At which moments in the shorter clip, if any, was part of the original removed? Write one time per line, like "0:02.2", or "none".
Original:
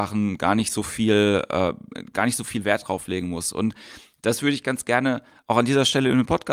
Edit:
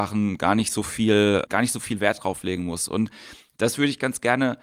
0:01.5